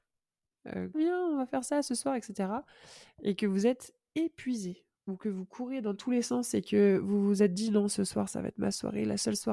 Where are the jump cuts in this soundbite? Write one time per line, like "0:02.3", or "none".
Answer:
0:00.9